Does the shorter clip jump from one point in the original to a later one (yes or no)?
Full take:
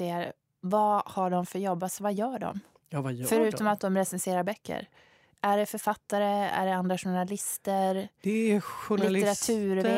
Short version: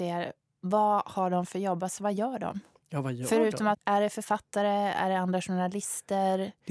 yes